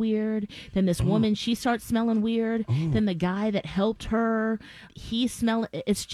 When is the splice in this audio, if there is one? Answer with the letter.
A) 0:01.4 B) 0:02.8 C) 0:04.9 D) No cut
C